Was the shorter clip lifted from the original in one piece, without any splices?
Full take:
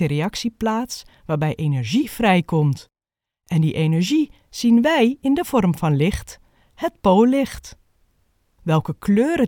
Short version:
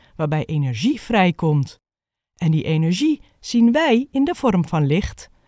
yes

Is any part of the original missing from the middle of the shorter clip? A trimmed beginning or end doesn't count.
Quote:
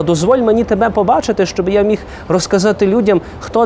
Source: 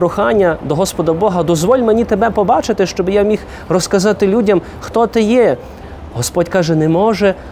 no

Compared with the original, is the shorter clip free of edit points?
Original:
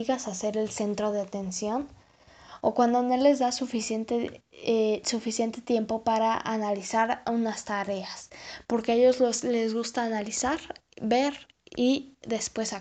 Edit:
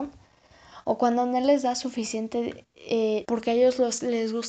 no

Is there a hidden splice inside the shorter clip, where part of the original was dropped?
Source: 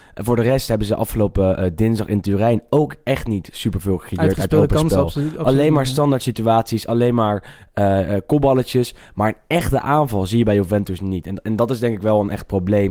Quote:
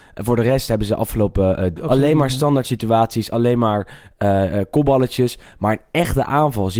yes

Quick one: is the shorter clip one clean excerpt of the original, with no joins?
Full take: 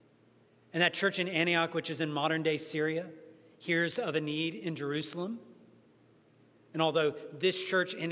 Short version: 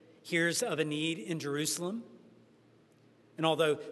yes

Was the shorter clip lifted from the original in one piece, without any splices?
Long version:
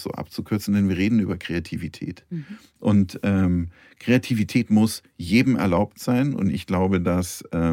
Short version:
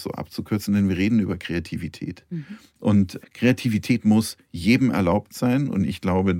no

